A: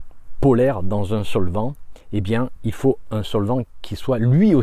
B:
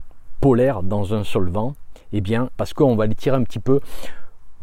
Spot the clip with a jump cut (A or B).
B